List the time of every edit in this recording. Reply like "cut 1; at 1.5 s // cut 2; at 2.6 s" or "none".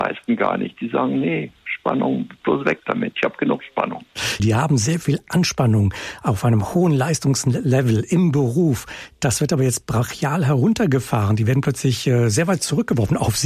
cut 1; at 4.4 s